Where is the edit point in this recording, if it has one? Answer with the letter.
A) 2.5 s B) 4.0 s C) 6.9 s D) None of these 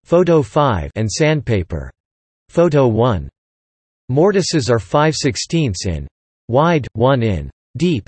A